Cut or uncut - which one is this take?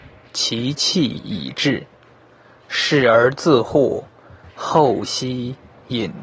uncut